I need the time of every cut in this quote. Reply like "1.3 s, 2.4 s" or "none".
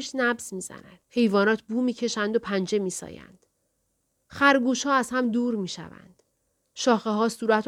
1.0 s